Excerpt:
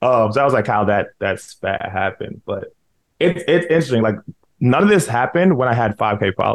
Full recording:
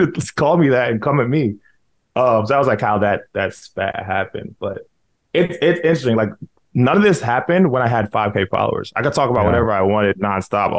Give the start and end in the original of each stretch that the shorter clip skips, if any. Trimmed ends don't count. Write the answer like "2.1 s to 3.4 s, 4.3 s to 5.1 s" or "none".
none